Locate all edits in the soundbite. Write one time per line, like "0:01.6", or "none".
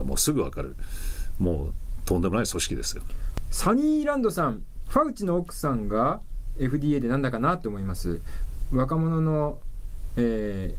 0:04.9